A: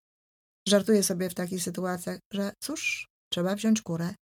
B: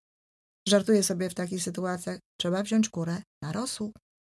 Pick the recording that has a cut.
B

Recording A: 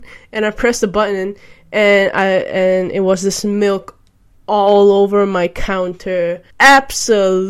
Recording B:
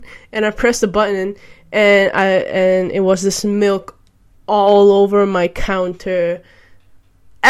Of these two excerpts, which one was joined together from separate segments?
A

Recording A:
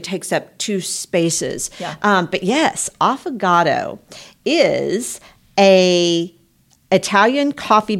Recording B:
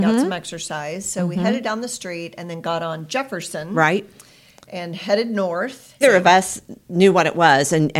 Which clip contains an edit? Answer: B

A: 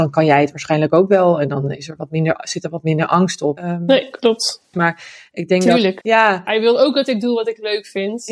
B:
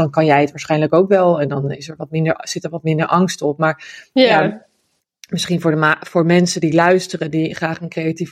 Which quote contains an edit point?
A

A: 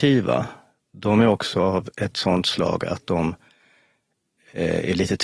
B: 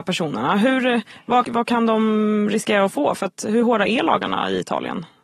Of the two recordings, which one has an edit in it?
B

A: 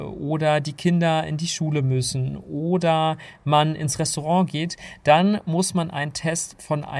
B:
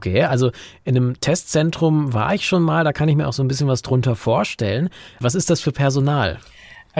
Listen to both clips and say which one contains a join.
B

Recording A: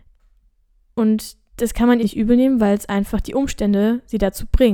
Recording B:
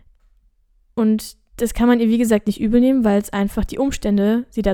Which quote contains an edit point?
A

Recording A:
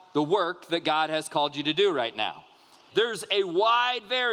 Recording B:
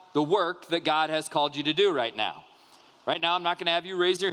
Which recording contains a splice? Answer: A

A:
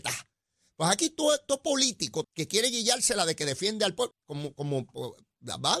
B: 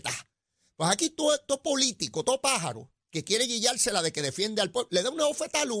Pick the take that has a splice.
A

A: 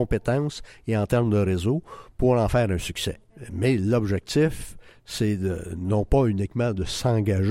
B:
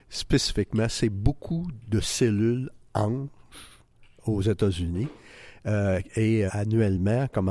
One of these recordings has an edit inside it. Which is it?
B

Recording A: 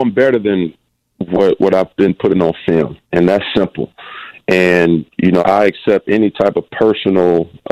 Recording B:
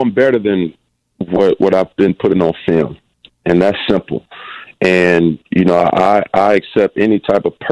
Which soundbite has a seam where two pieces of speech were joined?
A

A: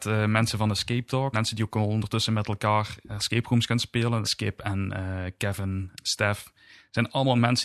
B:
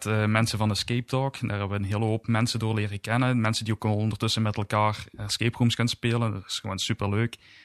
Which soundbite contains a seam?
A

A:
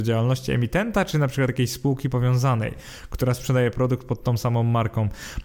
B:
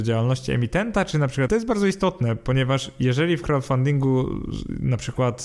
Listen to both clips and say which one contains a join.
B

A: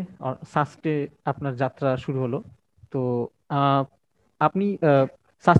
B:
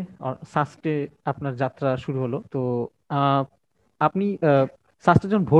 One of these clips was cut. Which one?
B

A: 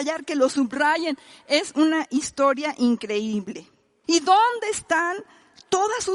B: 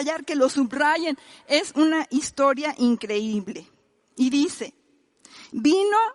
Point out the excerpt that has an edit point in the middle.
A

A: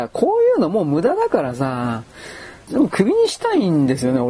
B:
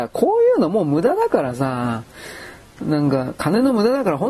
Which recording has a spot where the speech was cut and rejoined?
A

